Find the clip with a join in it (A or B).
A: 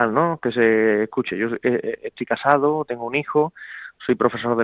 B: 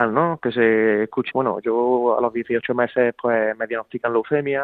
B